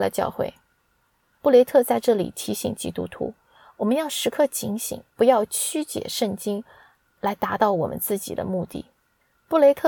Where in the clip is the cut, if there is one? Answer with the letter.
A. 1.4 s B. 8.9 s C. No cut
A